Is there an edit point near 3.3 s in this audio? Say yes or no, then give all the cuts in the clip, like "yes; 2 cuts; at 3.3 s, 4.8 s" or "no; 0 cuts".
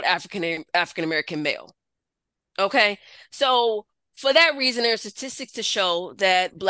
no; 0 cuts